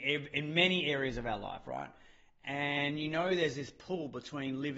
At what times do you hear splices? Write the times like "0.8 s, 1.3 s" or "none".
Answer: none